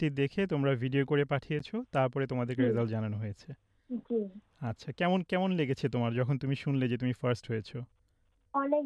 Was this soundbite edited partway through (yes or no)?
no